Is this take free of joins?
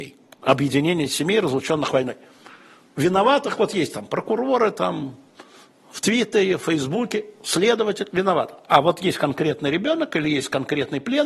no; 1 cut; at 8.1 s

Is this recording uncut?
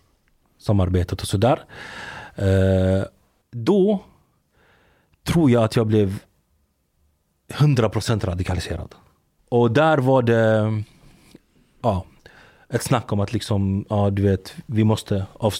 no; 2 cuts; at 3.4 s, 9.4 s

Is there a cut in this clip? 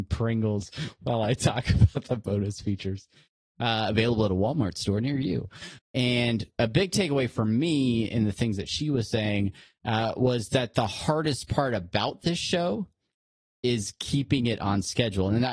yes; 1 cut; at 5.8 s

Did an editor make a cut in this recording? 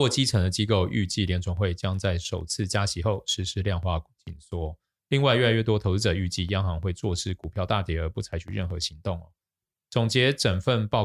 yes; 1 cut; at 5.0 s

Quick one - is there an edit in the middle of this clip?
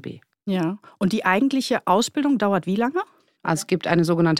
yes; 1 cut; at 3.4 s

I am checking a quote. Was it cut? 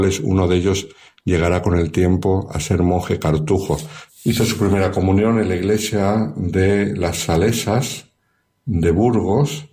yes; 1 cut; at 4.1 s

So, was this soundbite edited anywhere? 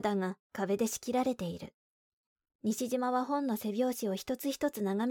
no; 0 cuts

